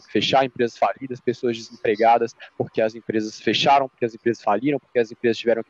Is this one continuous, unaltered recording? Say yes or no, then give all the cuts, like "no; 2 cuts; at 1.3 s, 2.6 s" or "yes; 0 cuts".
yes; 0 cuts